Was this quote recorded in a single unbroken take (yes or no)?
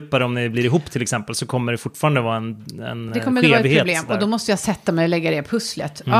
yes